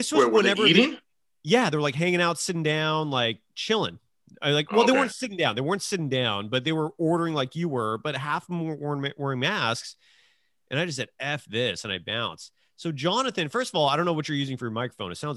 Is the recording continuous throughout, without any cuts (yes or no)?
yes